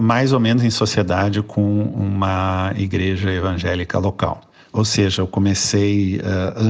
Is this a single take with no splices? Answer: no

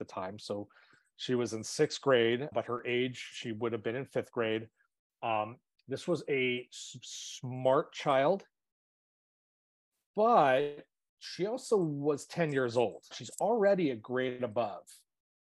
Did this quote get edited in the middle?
yes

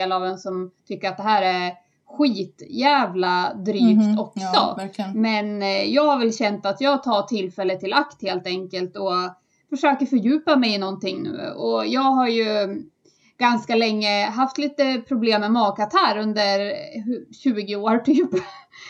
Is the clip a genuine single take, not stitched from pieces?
yes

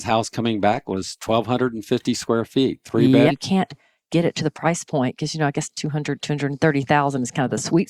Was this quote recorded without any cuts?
no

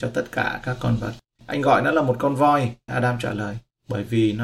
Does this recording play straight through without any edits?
no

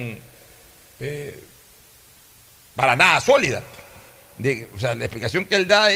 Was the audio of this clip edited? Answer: no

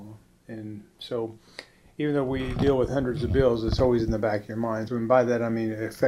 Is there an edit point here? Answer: yes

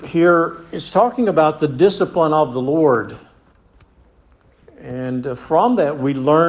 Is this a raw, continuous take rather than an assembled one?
yes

